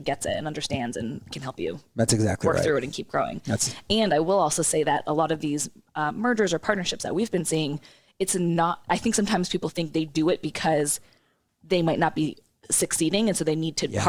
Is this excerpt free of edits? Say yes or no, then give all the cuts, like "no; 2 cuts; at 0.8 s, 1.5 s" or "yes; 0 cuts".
yes; 0 cuts